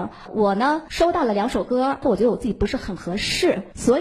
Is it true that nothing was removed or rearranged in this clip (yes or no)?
no